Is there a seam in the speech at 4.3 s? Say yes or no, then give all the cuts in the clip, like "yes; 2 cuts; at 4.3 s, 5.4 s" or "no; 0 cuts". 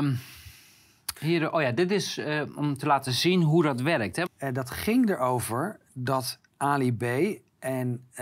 yes; 1 cut; at 4.3 s